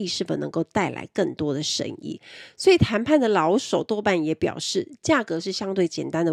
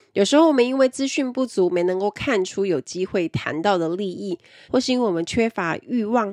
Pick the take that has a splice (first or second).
second